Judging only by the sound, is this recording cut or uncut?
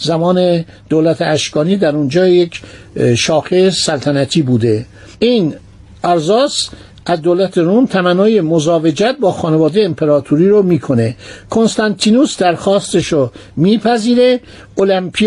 uncut